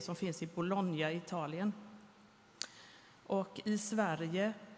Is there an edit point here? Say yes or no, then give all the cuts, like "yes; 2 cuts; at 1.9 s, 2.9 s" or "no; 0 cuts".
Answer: no; 0 cuts